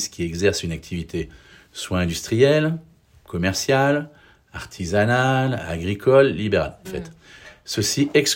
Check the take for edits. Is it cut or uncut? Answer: cut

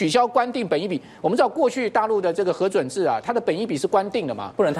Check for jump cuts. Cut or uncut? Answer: uncut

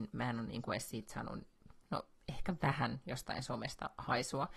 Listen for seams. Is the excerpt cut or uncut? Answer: uncut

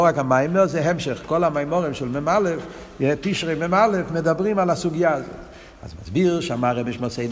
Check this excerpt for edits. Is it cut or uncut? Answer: uncut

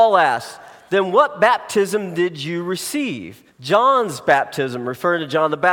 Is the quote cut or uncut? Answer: cut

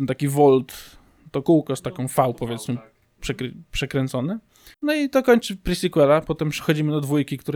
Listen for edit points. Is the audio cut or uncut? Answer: cut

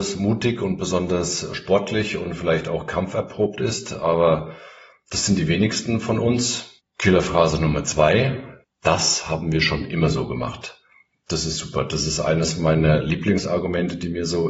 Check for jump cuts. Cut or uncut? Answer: cut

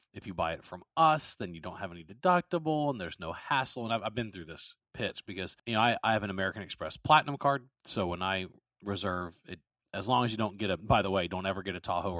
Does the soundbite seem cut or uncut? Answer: uncut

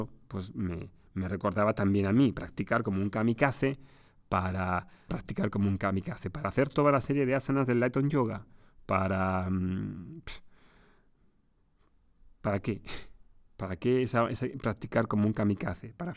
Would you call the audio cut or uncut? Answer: cut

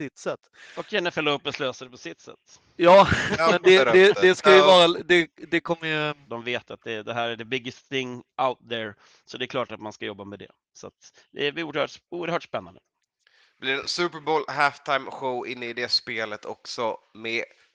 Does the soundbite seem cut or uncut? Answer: cut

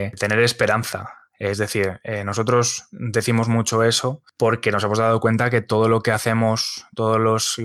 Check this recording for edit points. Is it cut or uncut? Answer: uncut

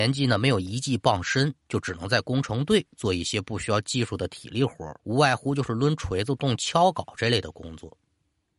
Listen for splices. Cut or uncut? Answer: cut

